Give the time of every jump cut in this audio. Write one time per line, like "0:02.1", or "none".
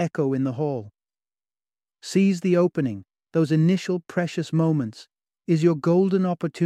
none